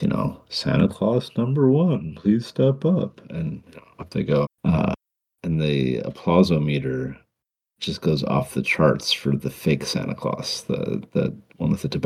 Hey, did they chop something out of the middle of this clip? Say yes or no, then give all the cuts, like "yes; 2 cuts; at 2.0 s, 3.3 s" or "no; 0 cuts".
yes; 1 cut; at 4.4 s